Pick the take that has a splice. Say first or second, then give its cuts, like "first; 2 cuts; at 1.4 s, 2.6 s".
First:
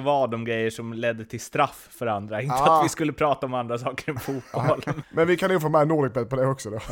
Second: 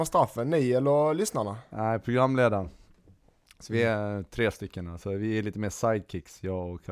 first; 1 cut; at 5.0 s